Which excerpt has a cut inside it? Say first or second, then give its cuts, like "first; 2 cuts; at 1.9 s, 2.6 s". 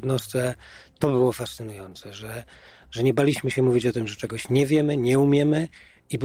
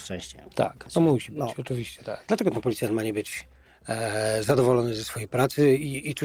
second; 1 cut; at 2.2 s